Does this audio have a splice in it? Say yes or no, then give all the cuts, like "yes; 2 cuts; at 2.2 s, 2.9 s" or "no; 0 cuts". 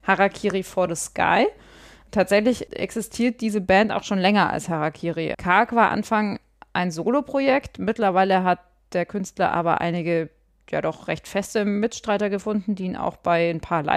yes; 1 cut; at 5.3 s